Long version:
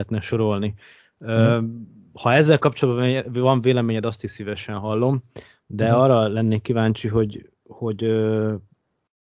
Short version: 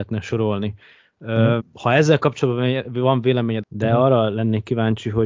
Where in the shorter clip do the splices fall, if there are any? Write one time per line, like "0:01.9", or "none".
0:01.6
0:03.6